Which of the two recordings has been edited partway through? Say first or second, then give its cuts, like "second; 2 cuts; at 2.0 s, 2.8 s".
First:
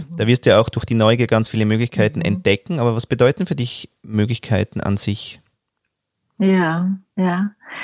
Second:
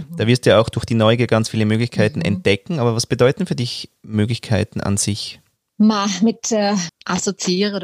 second; 2 cuts; at 5.7 s, 6.9 s